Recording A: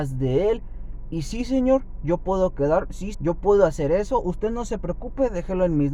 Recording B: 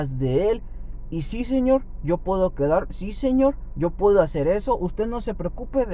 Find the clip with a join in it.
A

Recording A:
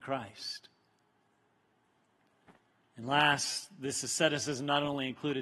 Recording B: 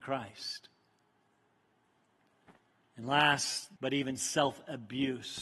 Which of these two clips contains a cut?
B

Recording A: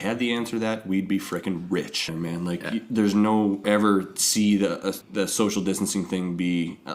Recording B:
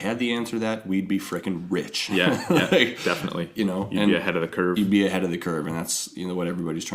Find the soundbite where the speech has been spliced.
A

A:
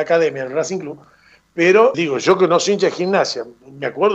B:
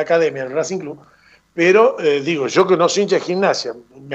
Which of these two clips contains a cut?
A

